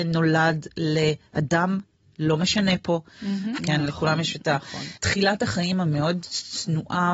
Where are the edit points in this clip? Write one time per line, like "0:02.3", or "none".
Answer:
0:03.6